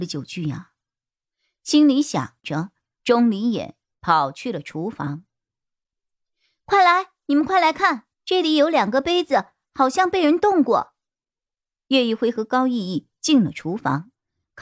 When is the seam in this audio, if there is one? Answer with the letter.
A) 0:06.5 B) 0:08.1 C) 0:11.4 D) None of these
B